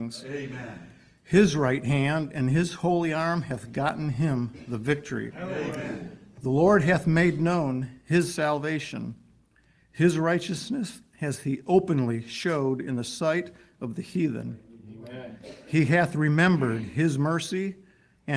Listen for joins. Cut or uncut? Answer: uncut